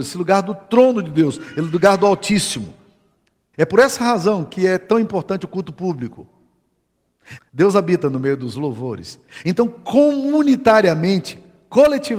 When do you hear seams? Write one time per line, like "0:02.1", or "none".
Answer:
0:03.5
0:07.4